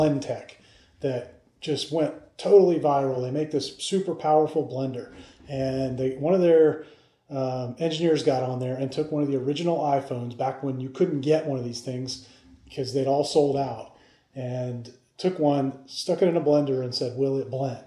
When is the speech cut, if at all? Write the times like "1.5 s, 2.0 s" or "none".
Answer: none